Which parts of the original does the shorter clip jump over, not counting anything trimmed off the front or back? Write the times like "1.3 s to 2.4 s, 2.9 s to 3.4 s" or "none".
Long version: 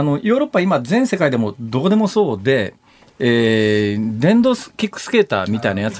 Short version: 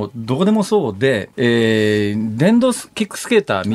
2.8 s to 3.2 s